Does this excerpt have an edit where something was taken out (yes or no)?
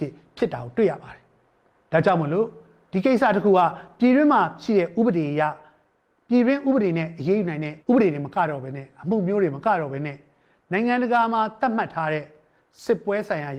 yes